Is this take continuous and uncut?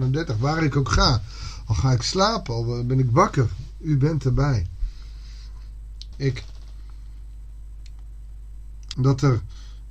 no; 2 cuts; at 6.1 s, 8.9 s

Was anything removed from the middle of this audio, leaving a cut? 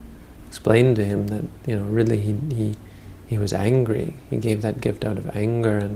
no; 0 cuts

